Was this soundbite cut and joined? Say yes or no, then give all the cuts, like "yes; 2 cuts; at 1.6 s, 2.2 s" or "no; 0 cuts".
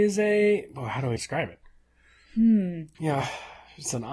yes; 2 cuts; at 1.2 s, 2.9 s